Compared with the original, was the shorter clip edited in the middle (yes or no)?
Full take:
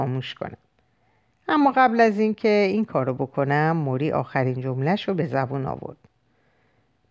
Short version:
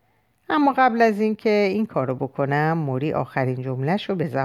no